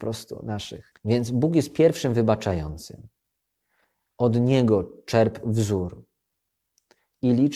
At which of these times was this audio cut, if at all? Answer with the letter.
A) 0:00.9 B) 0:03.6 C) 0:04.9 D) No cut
A